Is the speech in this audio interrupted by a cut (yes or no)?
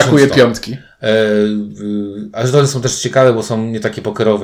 no